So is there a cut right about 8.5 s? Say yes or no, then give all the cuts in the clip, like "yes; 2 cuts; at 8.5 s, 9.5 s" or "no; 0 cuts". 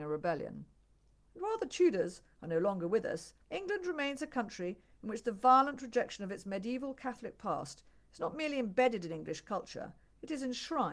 no; 2 cuts; at 1.3 s, 3.4 s